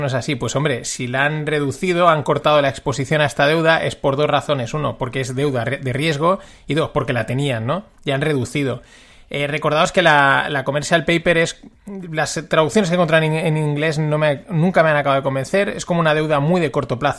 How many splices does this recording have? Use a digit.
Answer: 0